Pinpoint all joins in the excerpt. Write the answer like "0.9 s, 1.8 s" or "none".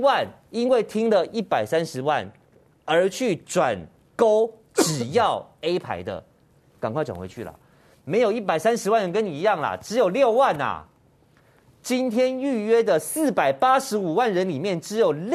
6.7 s